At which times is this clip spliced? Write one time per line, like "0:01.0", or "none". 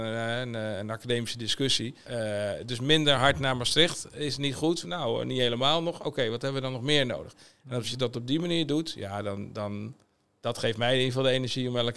0:02.0
0:04.8